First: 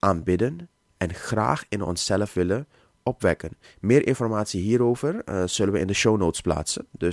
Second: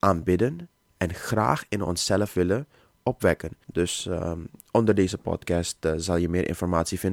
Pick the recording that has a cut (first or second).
second